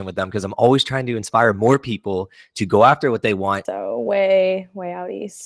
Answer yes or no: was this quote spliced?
yes